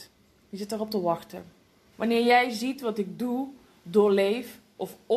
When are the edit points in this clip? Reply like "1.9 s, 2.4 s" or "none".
1.9 s